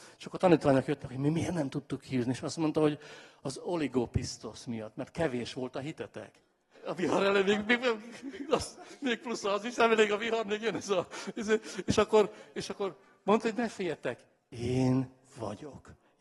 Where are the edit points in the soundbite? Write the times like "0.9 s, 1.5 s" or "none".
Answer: 6.7 s